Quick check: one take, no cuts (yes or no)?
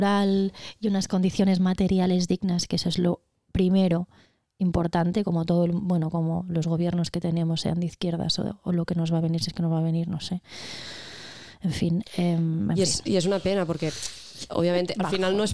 yes